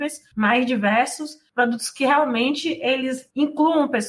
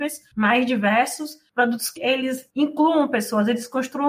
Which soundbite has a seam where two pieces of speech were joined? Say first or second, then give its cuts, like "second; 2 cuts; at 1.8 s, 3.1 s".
second; 1 cut; at 2.0 s